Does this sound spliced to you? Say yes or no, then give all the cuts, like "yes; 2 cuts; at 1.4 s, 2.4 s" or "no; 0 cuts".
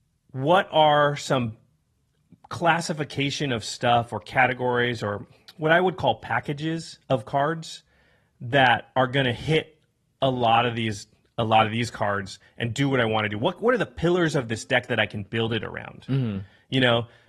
no; 0 cuts